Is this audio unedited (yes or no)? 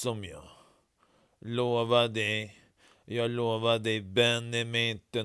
yes